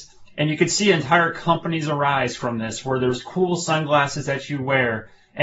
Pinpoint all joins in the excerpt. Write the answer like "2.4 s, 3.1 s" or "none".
none